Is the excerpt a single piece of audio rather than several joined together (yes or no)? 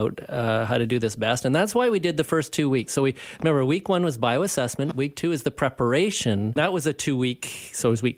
no